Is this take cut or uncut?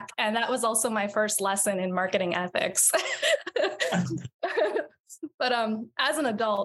cut